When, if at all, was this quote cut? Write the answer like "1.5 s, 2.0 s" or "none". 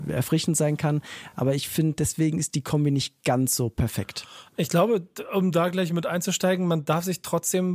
none